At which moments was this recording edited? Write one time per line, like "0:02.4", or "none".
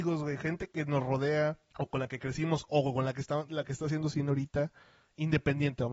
0:01.7